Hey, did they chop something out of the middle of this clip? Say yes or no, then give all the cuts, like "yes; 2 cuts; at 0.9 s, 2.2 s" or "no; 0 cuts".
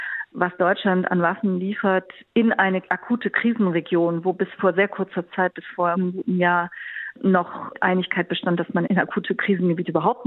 no; 0 cuts